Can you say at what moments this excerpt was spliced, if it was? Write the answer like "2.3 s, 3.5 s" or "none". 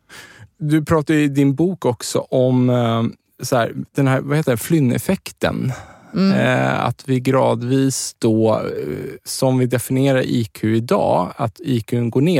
none